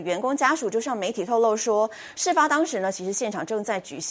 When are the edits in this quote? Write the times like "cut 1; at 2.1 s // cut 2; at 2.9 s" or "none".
none